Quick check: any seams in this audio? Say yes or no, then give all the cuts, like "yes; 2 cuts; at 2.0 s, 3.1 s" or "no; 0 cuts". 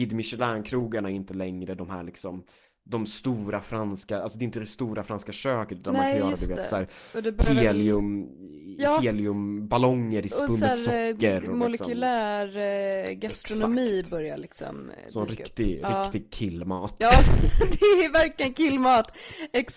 no; 0 cuts